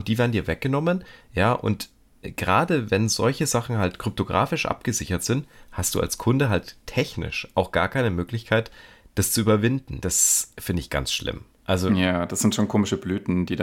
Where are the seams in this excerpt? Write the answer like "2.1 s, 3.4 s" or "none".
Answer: 10.0 s